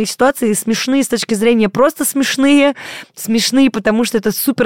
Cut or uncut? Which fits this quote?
uncut